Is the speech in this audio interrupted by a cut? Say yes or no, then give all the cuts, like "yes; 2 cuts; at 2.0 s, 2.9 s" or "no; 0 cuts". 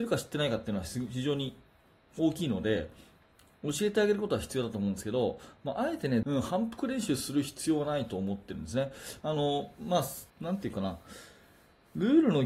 yes; 3 cuts; at 6.2 s, 9.2 s, 10.3 s